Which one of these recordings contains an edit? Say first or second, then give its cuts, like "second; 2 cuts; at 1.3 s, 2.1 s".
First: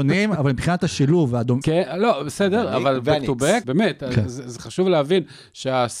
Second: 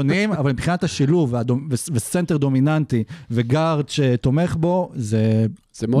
first; 2 cuts; at 1.6 s, 3.6 s